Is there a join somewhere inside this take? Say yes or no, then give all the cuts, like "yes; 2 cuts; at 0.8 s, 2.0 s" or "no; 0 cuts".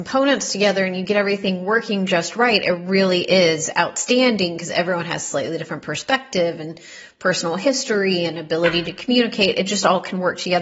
no; 0 cuts